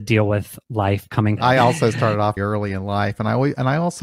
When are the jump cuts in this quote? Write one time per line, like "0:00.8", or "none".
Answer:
0:01.4
0:02.4

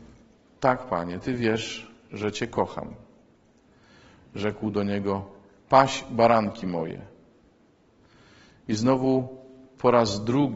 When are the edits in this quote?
none

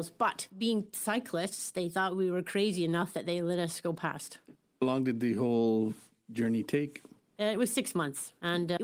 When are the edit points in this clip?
none

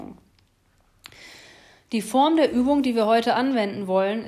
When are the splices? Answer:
none

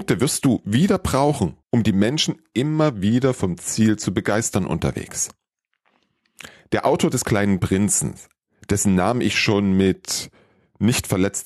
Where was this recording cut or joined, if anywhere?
0:01.6

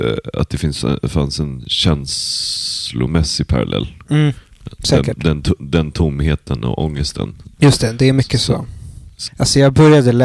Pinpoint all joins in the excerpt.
0:07.5
0:09.3

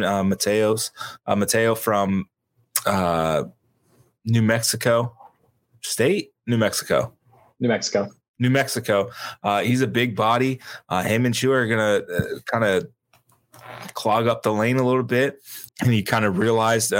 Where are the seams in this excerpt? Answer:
0:15.7

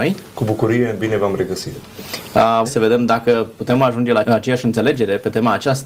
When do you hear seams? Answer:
0:02.6
0:04.2

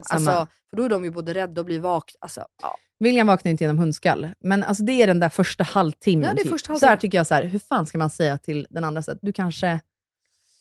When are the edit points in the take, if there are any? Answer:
0:06.8
0:09.2

